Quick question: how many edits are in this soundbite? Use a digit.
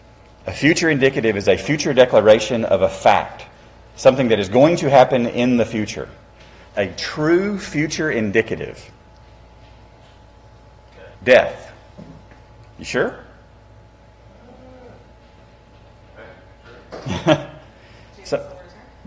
2